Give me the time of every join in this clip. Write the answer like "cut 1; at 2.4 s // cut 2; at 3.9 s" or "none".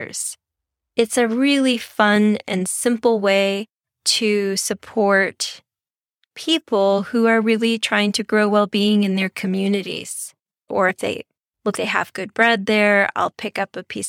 cut 1; at 10.7 s // cut 2; at 11.7 s